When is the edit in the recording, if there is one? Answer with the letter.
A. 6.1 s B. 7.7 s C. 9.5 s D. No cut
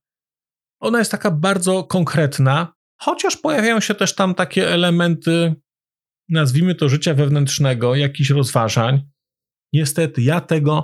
C